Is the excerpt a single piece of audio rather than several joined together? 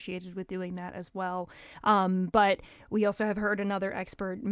yes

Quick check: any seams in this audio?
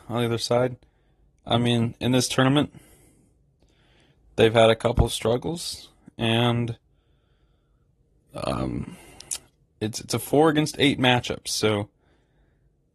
no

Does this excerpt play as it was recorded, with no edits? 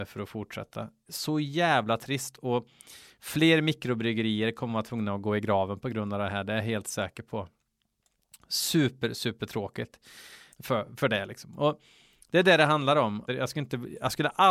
no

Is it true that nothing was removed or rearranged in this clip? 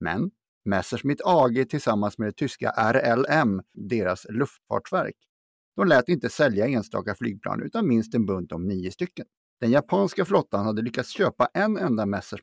no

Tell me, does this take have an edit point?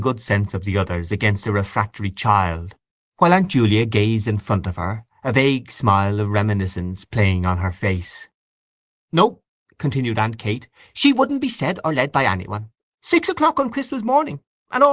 yes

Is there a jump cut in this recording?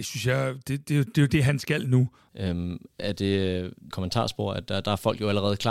yes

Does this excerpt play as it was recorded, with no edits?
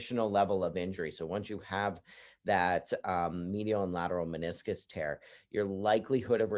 yes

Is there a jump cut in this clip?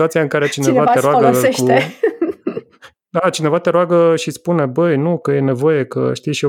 no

